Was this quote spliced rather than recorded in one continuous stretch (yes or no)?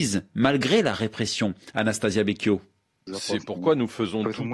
yes